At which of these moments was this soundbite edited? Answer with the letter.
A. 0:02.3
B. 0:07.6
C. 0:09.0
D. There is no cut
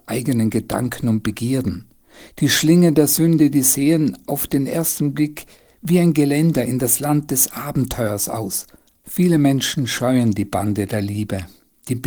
C